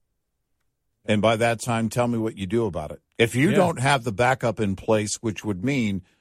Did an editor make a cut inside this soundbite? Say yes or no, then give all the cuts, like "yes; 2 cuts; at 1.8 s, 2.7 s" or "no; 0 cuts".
yes; 2 cuts; at 1.0 s, 3.1 s